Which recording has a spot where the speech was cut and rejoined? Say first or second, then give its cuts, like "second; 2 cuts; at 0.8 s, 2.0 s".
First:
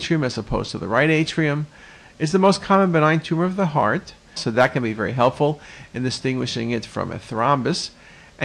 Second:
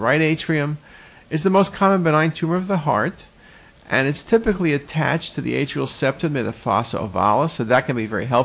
first; 1 cut; at 4.4 s